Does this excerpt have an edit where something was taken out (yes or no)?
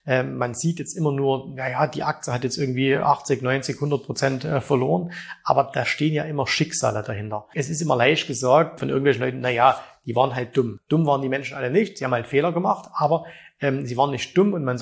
no